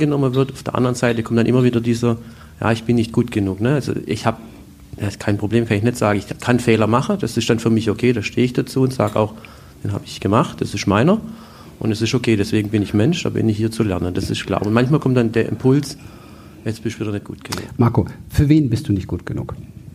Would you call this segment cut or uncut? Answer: uncut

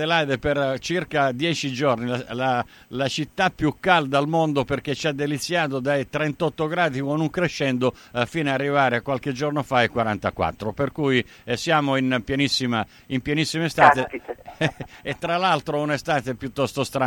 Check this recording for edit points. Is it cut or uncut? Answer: uncut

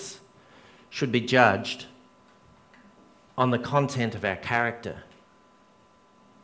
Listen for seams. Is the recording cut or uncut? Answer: uncut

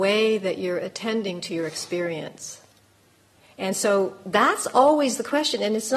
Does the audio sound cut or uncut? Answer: uncut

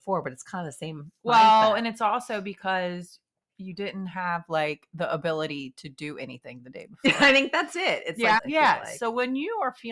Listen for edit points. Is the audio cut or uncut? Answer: cut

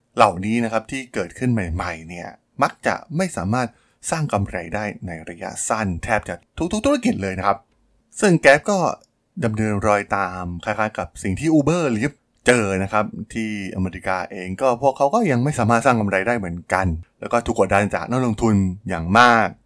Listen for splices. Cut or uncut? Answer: uncut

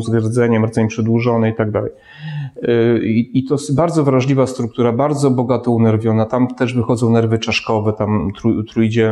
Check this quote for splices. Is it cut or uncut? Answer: uncut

